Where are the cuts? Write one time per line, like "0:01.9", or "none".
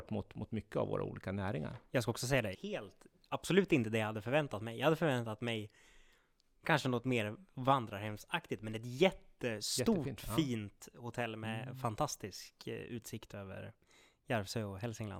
0:02.5